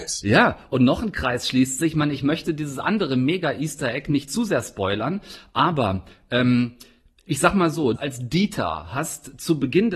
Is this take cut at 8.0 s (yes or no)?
yes